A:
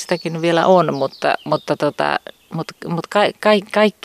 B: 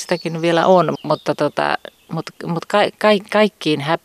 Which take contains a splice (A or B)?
B